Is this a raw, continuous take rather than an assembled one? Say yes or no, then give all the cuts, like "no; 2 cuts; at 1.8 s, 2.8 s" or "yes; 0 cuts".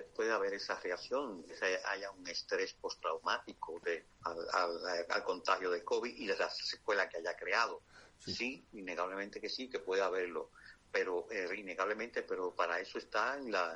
no; 1 cut; at 4.1 s